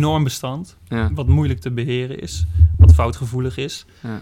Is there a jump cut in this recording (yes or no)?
no